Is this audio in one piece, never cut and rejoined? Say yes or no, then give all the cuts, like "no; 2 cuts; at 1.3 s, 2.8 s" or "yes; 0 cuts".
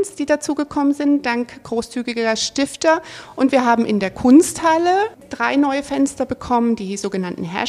yes; 0 cuts